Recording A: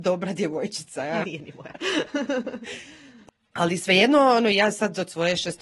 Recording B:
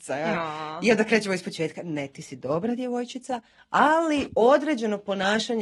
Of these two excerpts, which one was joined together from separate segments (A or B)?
A